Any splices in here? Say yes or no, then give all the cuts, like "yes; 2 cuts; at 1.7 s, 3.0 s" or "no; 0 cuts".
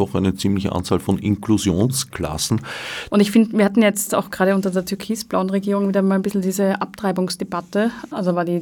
yes; 1 cut; at 3.1 s